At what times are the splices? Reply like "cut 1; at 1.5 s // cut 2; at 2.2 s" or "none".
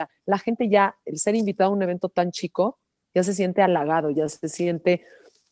none

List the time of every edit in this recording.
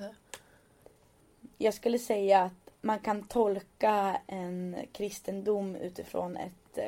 cut 1; at 2.8 s

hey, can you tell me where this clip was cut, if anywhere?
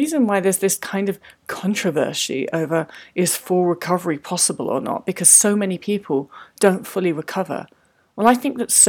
none

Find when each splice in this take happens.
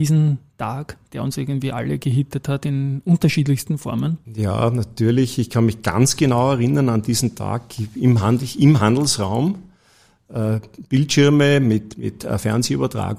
cut 1; at 4.2 s // cut 2; at 10.3 s

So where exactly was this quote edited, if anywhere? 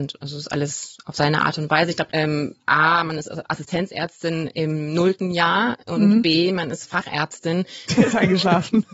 cut 1; at 2.1 s // cut 2; at 7.9 s

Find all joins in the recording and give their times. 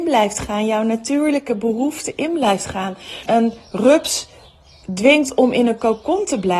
cut 1; at 3.3 s

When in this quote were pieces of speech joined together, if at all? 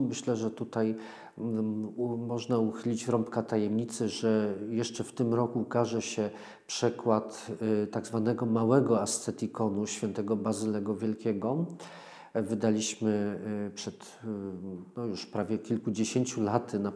none

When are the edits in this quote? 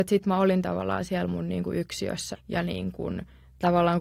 cut 1; at 2.3 s

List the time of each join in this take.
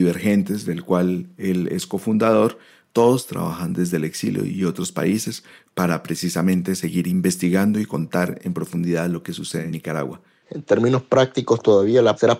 cut 1; at 10.4 s

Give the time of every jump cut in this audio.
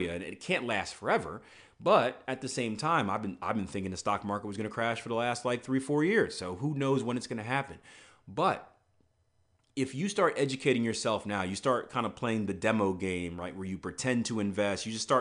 none

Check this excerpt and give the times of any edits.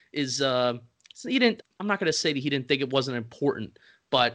cut 1; at 1.6 s

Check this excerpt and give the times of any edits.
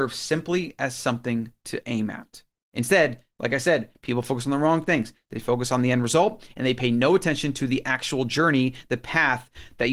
cut 1; at 2.6 s

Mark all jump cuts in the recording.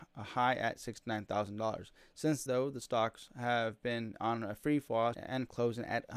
cut 1; at 2.5 s // cut 2; at 5.1 s

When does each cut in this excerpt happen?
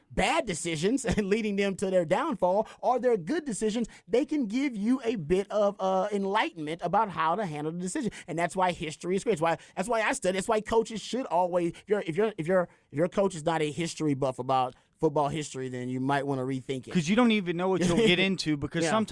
none

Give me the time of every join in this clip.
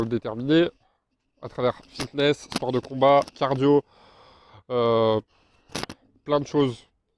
none

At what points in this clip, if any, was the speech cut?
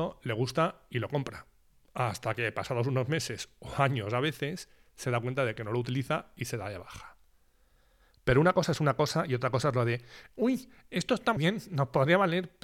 cut 1; at 11.4 s

